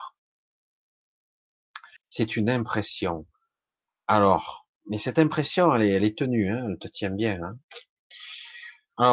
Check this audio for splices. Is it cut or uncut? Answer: cut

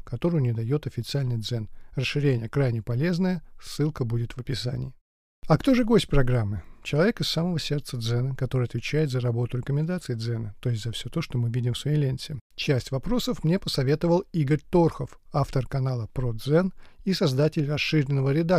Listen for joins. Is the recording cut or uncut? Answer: cut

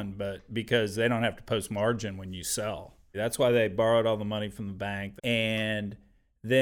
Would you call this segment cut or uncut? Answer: cut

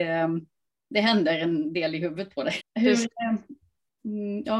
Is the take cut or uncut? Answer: cut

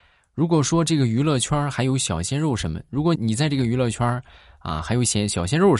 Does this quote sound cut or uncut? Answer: cut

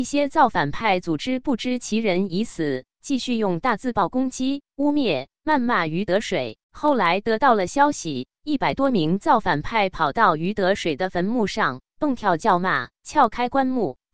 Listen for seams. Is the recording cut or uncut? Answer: cut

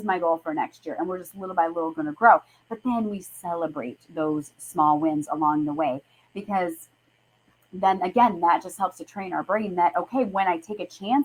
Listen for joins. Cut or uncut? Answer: uncut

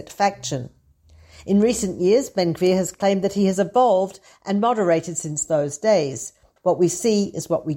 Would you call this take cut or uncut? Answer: cut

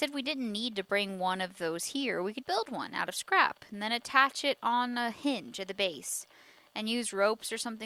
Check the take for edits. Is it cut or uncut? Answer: cut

